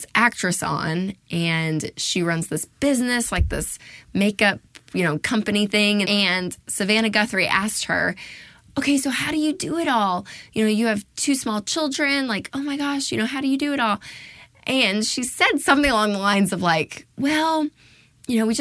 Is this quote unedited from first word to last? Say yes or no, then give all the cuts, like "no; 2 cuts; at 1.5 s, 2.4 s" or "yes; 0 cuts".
no; 1 cut; at 6.0 s